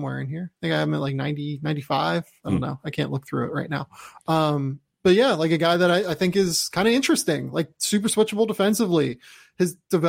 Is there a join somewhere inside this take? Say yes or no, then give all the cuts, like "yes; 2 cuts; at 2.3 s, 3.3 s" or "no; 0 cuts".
no; 0 cuts